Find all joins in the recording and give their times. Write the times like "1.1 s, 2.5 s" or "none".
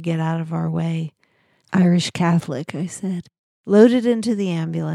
1.6 s